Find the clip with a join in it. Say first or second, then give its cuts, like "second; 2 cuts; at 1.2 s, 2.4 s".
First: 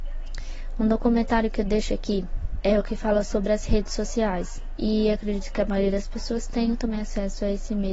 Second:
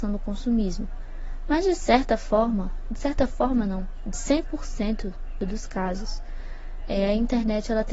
first; 2 cuts; at 2.6 s, 4.8 s